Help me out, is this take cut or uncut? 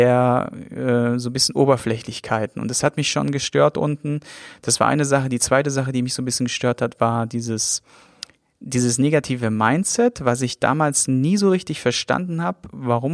uncut